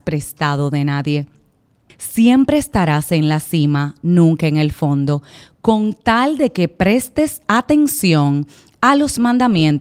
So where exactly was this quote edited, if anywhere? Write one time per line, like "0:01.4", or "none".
0:01.9

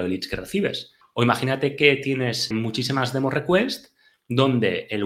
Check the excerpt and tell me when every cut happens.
0:01.0
0:02.5

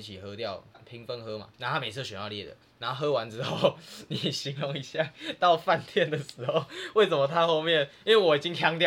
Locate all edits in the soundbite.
0:01.5

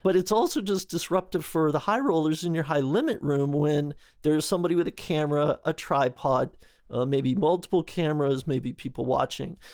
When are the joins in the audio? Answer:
none

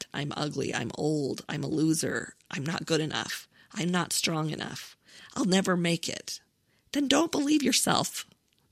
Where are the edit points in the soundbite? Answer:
none

